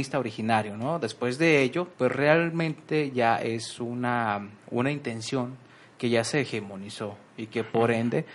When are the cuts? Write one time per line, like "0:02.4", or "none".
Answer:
0:01.9